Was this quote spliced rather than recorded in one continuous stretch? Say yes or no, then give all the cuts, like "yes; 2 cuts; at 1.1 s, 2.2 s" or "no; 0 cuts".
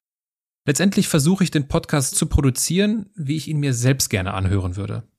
yes; 1 cut; at 2.1 s